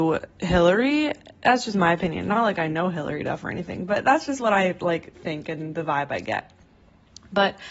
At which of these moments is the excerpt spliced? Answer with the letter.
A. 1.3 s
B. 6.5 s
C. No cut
C